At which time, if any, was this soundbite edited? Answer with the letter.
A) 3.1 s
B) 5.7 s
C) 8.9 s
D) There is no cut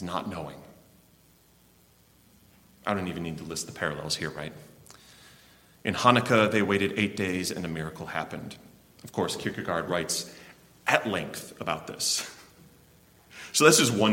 C